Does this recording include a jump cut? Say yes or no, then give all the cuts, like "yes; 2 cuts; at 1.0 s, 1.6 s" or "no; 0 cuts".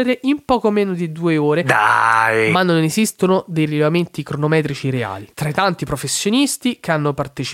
no; 0 cuts